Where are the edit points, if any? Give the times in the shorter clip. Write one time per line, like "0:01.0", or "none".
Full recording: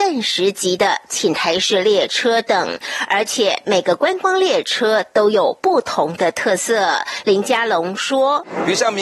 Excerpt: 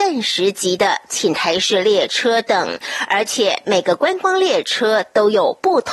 none